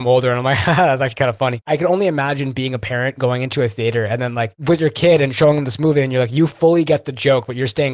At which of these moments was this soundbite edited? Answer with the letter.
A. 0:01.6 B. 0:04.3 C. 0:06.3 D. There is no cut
D